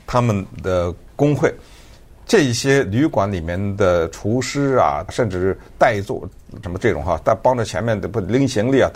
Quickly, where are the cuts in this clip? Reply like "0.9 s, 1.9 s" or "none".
5.1 s, 6.6 s